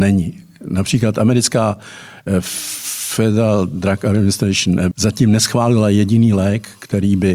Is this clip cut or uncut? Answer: cut